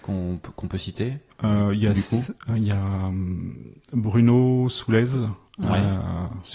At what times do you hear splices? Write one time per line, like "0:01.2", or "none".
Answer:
none